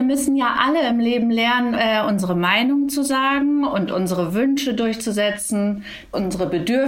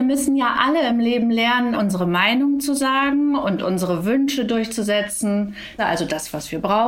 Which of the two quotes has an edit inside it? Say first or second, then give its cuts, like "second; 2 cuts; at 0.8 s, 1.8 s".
second; 2 cuts; at 1.7 s, 5.8 s